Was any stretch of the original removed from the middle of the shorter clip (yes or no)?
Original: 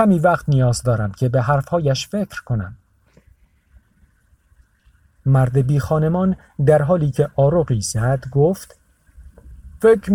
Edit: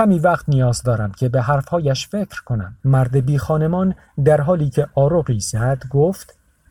yes